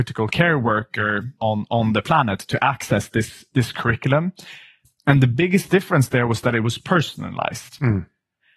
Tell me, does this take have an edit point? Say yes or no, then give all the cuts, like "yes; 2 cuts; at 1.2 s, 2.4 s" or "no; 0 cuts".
yes; 1 cut; at 1.4 s